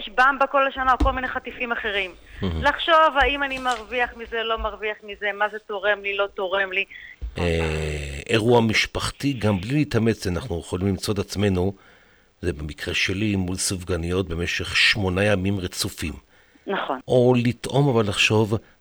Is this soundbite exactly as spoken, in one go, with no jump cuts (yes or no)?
no